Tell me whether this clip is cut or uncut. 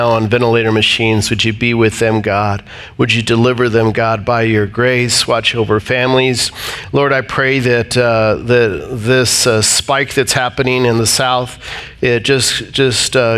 uncut